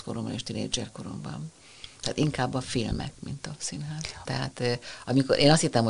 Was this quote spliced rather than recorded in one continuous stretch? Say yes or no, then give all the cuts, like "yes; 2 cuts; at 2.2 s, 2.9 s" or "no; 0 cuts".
yes; 1 cut; at 4.2 s